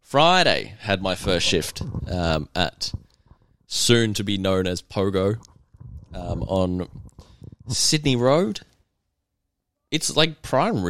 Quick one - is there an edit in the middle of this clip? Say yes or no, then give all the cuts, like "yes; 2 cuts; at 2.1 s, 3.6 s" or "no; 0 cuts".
no; 0 cuts